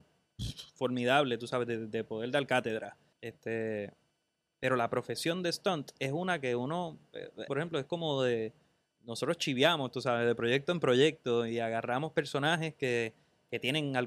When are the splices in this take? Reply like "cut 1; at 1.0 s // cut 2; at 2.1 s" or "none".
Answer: cut 1; at 3.1 s // cut 2; at 7.5 s